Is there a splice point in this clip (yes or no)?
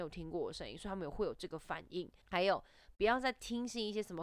yes